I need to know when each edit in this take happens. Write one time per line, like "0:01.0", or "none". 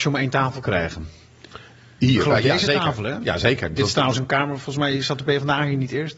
none

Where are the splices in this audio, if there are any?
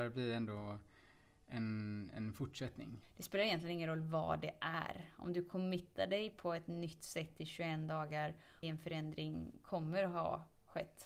0:03.0
0:08.6

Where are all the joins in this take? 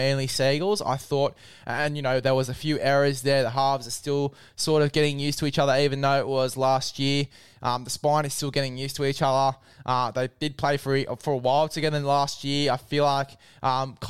none

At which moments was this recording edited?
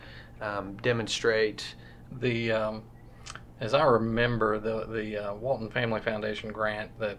0:02.1

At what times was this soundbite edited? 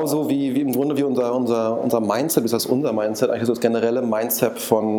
none

